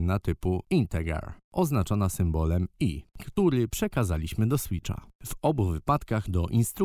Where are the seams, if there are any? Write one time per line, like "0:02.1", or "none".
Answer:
0:03.1
0:05.1